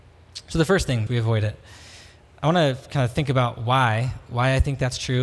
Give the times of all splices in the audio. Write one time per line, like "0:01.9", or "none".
0:01.1